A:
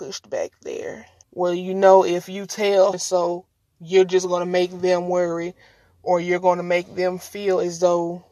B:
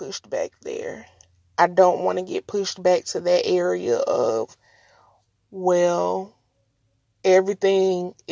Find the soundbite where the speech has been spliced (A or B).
A